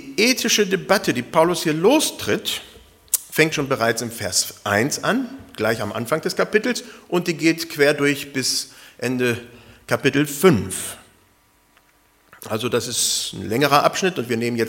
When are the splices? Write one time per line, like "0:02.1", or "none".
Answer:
0:03.5